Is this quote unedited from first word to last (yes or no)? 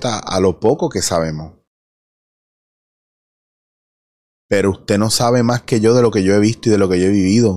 yes